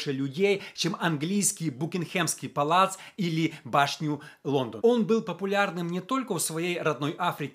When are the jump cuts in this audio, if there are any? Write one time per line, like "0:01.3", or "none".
0:04.8